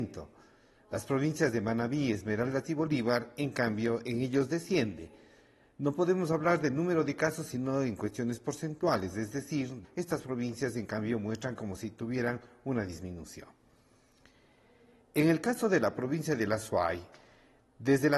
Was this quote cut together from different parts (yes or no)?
yes